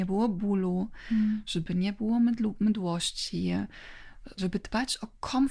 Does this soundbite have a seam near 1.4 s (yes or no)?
no